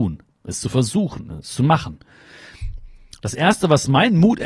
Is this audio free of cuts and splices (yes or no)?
yes